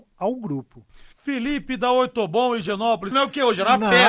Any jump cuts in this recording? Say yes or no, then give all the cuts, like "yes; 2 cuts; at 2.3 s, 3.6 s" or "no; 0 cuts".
yes; 2 cuts; at 1.1 s, 3.1 s